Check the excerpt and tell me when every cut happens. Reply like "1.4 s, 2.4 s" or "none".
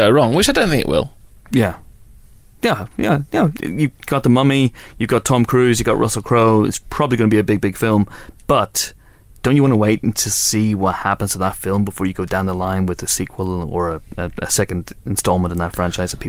1.5 s, 3.5 s